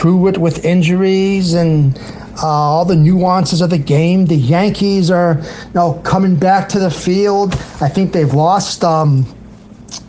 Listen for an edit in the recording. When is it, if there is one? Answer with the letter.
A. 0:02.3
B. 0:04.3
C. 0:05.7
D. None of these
D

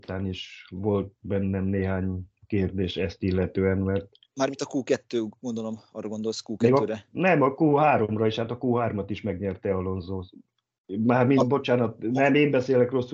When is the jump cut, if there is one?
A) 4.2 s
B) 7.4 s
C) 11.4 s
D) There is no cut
C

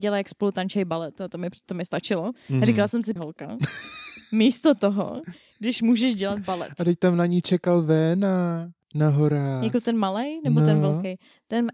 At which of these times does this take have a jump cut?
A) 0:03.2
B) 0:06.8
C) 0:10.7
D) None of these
A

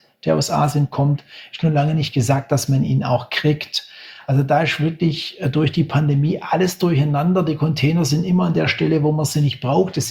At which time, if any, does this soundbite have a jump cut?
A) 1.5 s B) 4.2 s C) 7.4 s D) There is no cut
D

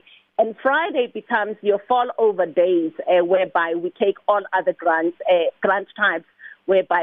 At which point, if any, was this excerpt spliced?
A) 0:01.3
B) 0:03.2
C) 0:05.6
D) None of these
D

